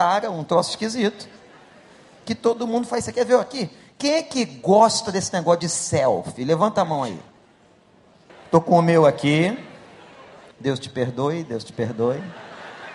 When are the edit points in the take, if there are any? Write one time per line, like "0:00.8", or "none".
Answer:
0:08.3
0:10.5